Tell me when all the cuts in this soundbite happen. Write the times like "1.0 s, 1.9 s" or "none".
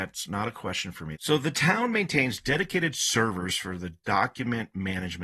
1.1 s